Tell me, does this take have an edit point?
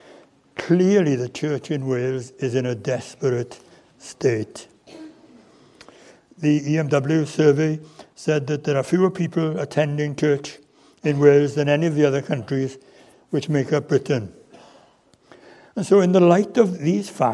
no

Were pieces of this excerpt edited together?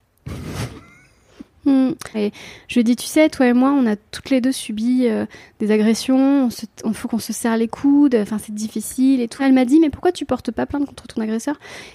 yes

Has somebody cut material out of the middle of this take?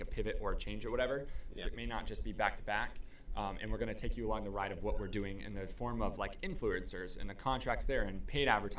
yes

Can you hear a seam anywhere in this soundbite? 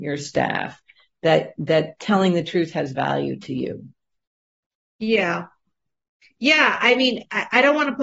no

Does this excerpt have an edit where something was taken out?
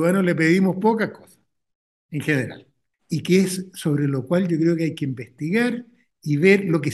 yes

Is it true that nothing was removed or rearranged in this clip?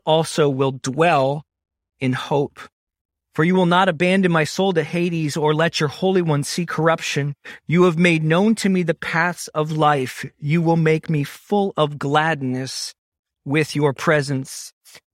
yes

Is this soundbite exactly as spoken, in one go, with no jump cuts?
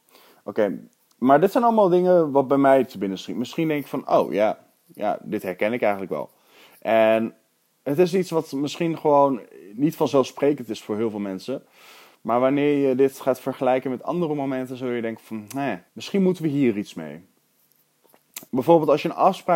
no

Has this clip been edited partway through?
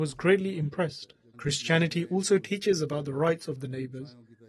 yes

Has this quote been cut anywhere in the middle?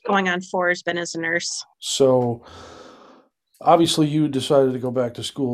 yes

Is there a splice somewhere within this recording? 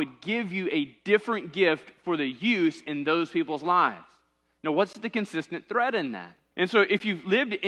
yes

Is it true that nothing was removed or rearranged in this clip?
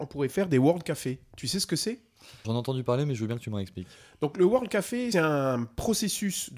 no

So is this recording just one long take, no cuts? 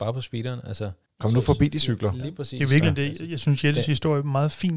yes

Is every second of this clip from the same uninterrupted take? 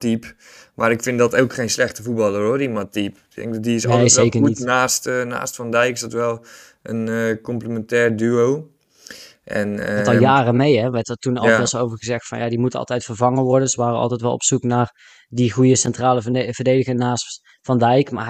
yes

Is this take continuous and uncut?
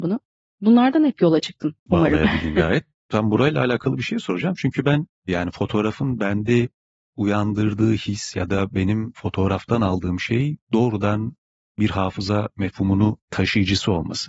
no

